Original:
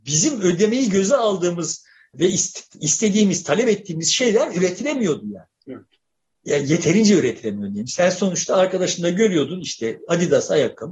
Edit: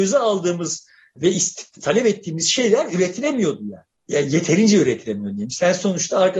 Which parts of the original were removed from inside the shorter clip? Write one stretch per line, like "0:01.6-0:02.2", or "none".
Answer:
0:02.8-0:03.4
0:05.6-0:06.3